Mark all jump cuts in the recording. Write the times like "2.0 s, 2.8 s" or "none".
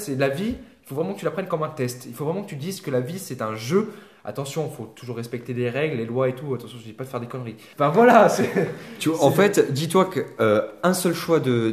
7.7 s